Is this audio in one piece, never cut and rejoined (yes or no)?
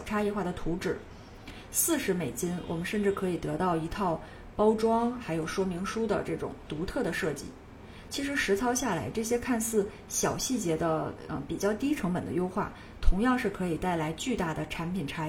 yes